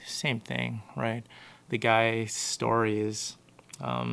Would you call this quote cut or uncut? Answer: uncut